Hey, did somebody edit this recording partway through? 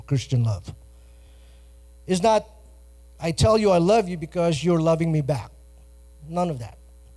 no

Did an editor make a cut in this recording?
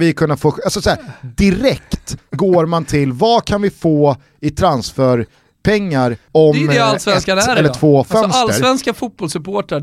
no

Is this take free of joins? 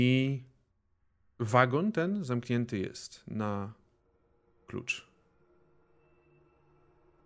yes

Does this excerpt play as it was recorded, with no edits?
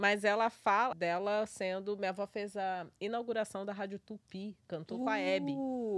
no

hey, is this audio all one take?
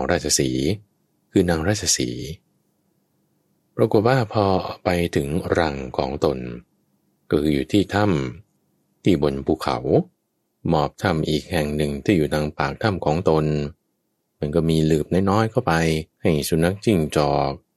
no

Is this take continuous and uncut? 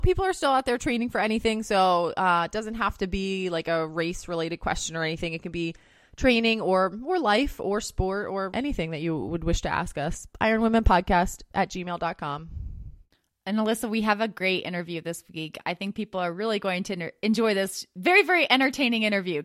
no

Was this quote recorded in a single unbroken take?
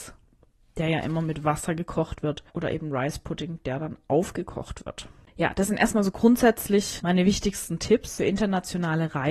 no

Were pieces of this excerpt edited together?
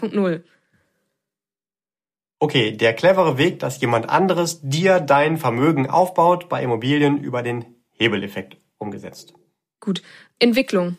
no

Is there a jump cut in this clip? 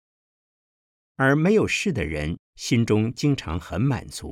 yes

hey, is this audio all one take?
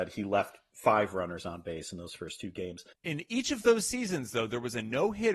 no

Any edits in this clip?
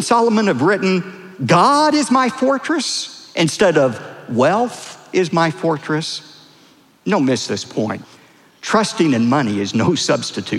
no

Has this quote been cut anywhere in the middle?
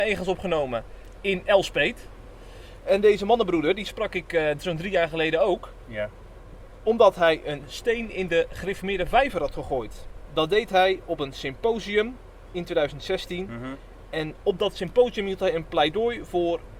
no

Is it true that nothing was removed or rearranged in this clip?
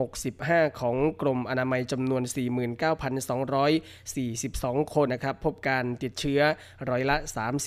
no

